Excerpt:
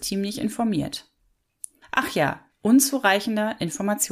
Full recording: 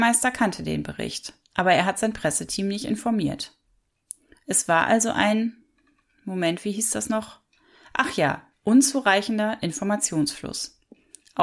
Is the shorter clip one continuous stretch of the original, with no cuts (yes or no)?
no